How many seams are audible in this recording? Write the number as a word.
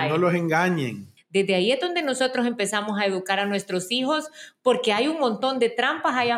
one